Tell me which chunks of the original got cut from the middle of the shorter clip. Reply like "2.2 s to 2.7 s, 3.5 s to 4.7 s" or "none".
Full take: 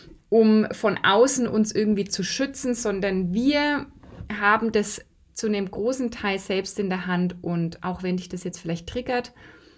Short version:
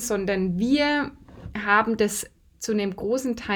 none